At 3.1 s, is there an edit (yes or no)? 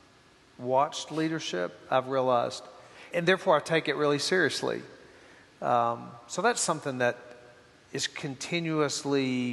yes